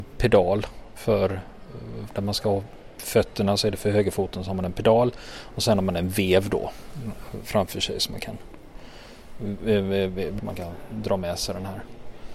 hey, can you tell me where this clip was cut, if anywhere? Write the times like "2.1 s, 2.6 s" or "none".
2.1 s, 10.4 s